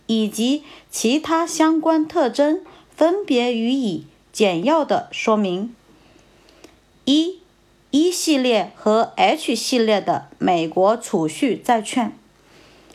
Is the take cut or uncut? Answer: uncut